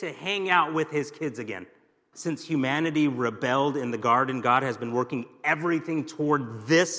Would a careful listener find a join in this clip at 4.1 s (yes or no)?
no